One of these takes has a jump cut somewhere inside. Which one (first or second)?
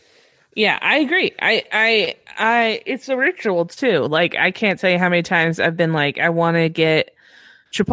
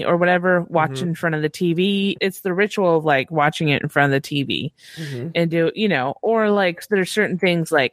second